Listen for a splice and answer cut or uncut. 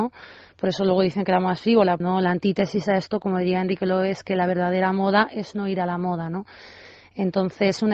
cut